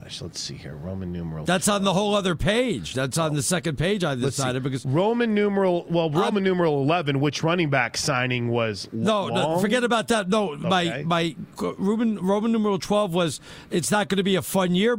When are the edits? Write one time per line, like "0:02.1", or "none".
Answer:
none